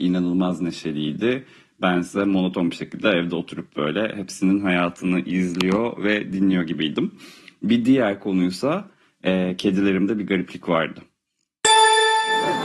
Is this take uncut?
yes; 0 cuts

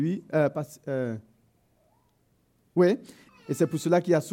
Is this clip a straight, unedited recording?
no; 1 cut; at 3.3 s

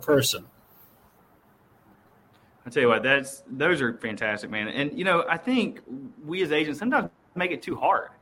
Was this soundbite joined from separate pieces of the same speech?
no; 0 cuts

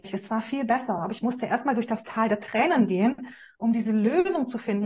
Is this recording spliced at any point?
no; 0 cuts

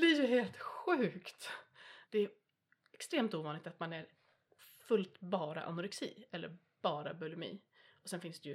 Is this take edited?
yes; 1 cut; at 2.1 s

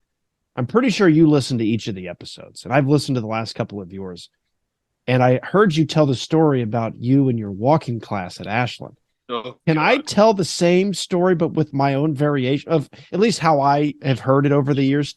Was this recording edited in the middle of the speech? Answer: no; 0 cuts

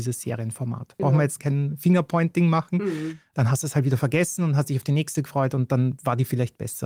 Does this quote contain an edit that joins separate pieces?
yes; 1 cut; at 1.0 s

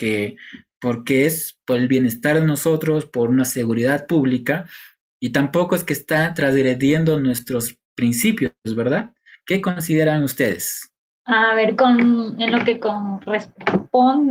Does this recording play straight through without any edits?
yes; 0 cuts

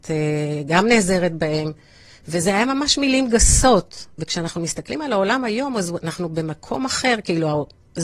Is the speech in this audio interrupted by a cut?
no; 0 cuts

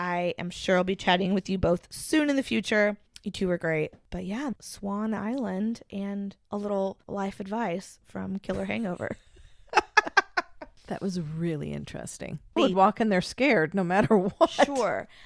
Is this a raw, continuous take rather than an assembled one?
no; 2 cuts; at 4.5 s, 12.6 s

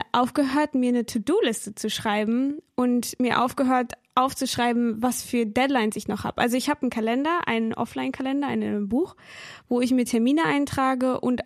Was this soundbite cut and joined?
no; 0 cuts

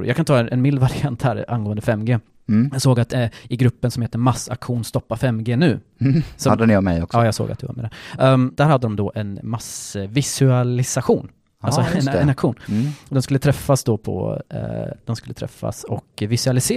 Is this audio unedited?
yes; 0 cuts

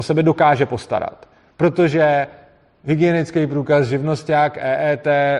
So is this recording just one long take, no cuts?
no; 1 cut; at 1.5 s

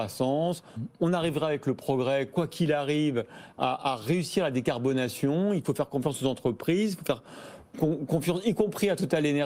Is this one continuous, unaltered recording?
yes; 0 cuts

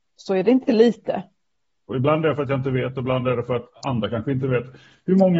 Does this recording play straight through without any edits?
no; 1 cut; at 1.9 s

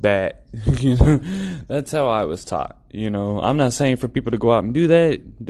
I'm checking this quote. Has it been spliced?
no; 0 cuts

